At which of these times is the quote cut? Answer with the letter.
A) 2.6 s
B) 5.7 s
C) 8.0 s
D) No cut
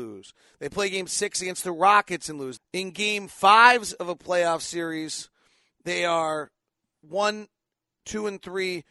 A